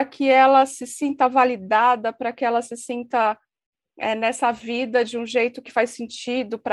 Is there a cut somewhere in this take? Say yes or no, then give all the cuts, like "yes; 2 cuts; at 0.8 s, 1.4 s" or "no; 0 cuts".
no; 0 cuts